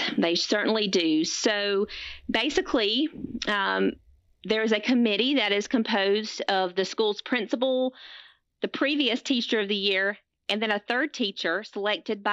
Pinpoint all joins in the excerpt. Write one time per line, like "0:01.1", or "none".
none